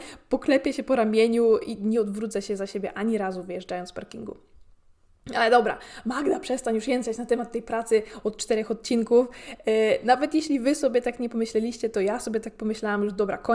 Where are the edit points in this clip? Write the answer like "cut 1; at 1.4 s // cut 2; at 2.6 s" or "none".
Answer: none